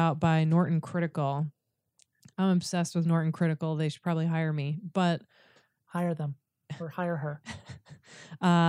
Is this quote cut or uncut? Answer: uncut